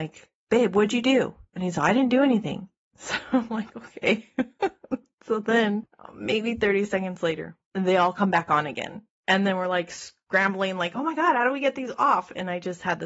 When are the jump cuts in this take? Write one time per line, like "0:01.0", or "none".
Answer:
none